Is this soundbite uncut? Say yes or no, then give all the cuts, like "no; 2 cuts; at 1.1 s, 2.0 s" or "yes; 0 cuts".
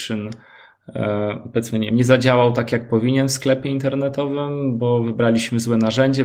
yes; 0 cuts